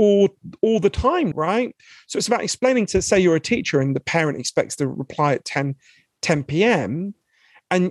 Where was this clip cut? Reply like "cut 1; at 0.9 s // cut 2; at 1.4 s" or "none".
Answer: cut 1; at 1.3 s